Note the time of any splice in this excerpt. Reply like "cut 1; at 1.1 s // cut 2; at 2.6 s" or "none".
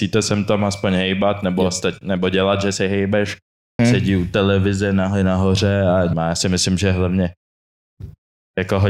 cut 1; at 3.8 s // cut 2; at 6.1 s

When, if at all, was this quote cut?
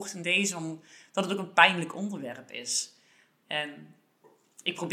none

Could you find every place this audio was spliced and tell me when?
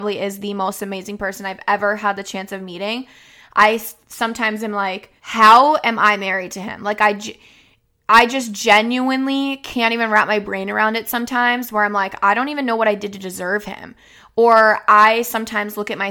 cut 1; at 5.2 s

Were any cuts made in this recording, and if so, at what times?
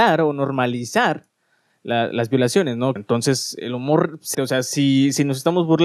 cut 1; at 3.0 s // cut 2; at 4.3 s

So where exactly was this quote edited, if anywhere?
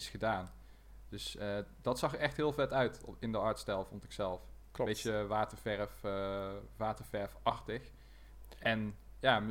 none

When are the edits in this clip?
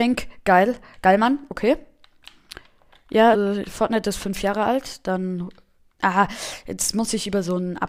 cut 1; at 3.3 s

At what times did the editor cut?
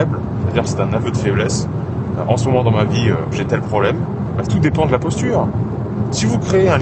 cut 1; at 4.4 s

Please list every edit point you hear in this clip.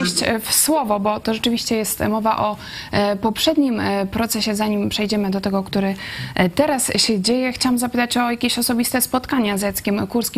none

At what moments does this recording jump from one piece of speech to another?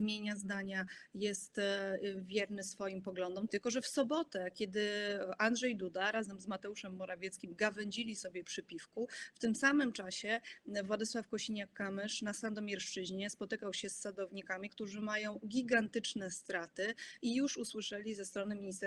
cut 1; at 3.5 s // cut 2; at 14.7 s

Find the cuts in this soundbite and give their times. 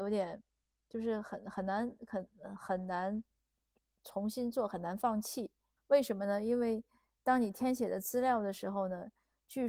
cut 1; at 5.8 s

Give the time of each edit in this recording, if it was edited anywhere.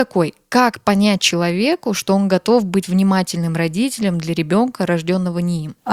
none

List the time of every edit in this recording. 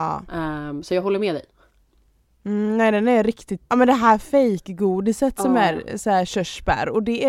cut 1; at 3.7 s

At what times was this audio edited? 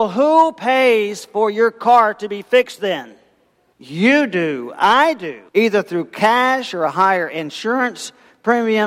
cut 1; at 3.7 s // cut 2; at 5.5 s

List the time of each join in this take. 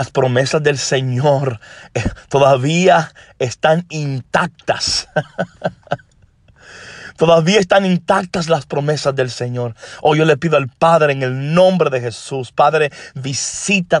none

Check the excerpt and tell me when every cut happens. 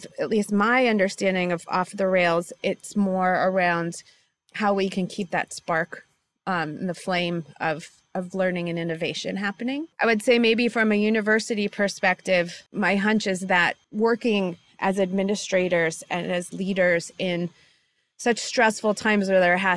cut 1; at 9.9 s // cut 2; at 12.7 s // cut 3; at 13.8 s

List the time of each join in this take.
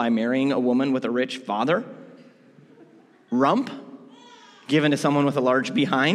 none

